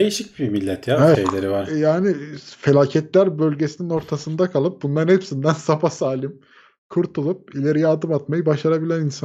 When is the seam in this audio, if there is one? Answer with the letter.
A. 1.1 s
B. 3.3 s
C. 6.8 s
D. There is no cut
A